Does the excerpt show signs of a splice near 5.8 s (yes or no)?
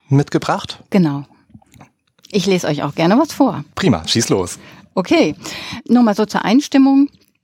yes